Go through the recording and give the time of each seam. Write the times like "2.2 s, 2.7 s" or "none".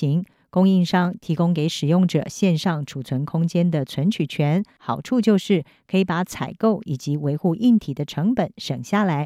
4.8 s